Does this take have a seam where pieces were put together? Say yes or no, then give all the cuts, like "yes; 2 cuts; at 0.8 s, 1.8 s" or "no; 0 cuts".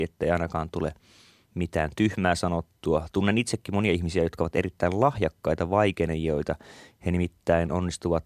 no; 0 cuts